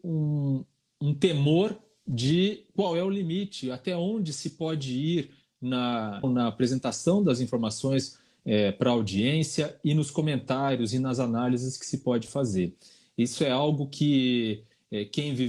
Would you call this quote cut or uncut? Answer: cut